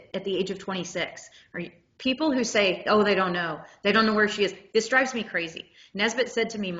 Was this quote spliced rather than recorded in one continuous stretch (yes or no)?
no